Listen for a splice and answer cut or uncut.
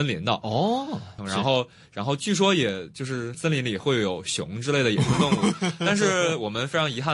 cut